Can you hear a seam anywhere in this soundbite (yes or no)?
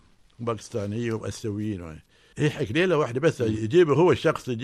yes